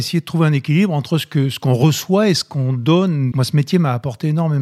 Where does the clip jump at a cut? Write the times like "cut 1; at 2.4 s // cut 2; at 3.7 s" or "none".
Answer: cut 1; at 3.3 s